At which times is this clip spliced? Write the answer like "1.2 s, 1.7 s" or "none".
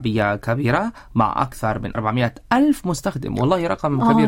1.9 s